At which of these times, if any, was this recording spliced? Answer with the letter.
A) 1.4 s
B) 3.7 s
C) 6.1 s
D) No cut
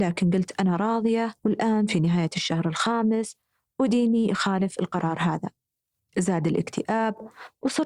A